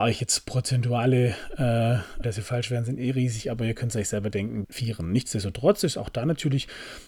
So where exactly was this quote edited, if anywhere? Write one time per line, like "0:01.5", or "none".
0:02.2
0:04.6

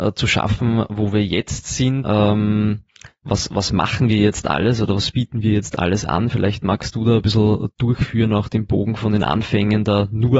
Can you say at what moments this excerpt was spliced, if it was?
0:02.0

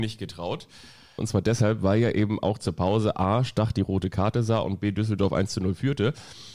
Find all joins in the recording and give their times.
0:01.2

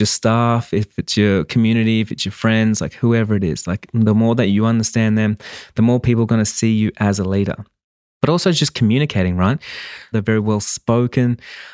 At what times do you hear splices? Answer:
0:10.1

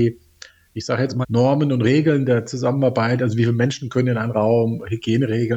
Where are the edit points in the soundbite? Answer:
0:01.2

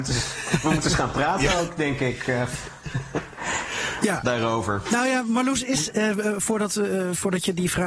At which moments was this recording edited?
none

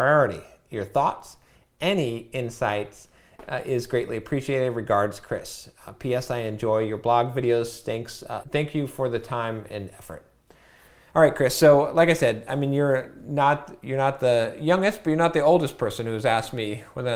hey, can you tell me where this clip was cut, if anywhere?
0:08.4

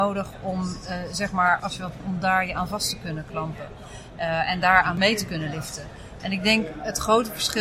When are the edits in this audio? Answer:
0:02.0
0:06.2

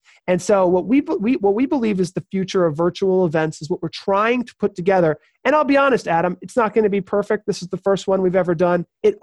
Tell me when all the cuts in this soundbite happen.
none

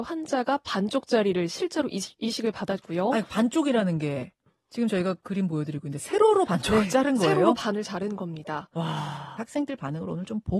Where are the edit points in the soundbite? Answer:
0:09.4

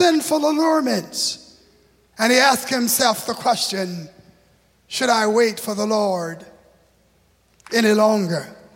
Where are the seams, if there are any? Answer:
0:02.1

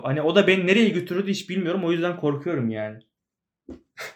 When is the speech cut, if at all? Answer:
none

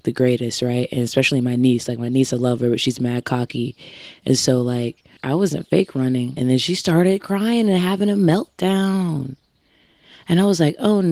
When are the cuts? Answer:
0:05.2
0:06.4

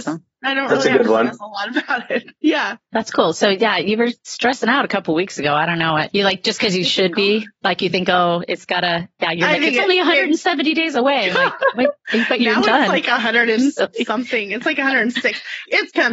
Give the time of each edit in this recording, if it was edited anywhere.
none

